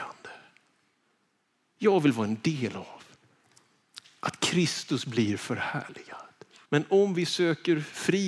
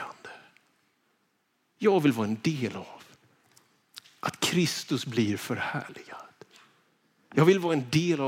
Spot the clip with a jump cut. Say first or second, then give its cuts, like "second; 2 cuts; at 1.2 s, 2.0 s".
first; 1 cut; at 6.7 s